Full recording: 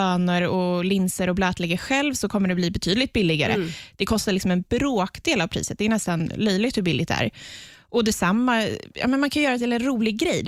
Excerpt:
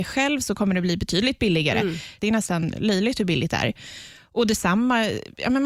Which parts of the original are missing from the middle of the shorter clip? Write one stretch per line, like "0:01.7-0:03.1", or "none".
0:03.9-0:05.8

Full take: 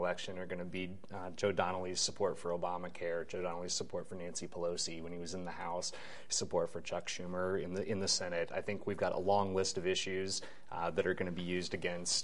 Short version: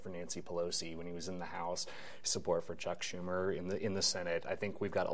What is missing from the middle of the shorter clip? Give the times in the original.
none

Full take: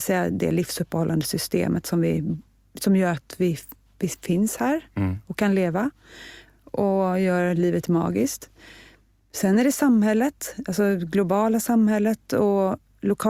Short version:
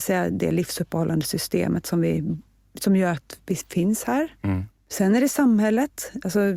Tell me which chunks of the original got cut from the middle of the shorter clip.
0:03.4-0:03.9
0:05.2-0:09.1

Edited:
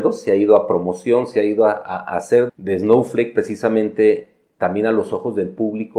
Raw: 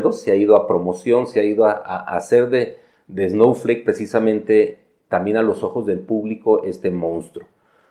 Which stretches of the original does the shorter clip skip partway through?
0:02.5-0:03.0

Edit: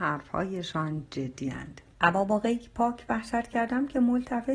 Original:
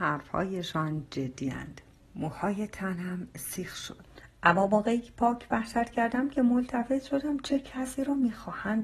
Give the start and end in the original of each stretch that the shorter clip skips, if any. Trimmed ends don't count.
0:01.9-0:04.3

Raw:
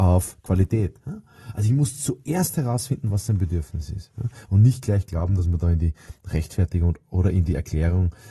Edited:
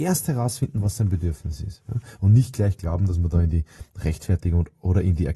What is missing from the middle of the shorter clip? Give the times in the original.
none

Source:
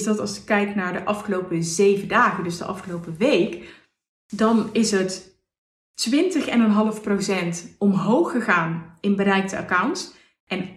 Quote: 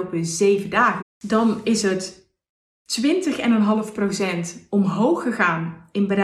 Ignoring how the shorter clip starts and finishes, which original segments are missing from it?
0:02.4-0:04.1

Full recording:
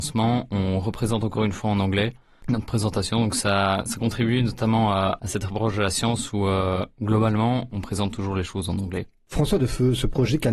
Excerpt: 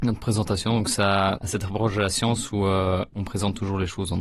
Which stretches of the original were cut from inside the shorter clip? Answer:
0:03.8-0:05.2
0:06.9-0:07.7

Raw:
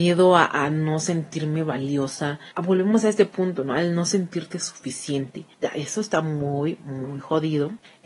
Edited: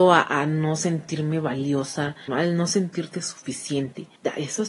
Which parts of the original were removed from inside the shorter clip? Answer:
0:02.5-0:03.7

